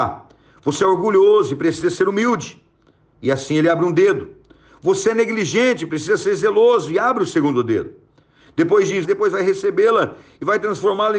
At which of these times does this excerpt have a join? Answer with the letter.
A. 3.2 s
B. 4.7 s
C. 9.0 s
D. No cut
C